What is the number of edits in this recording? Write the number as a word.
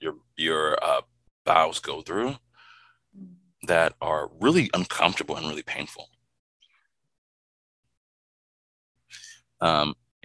zero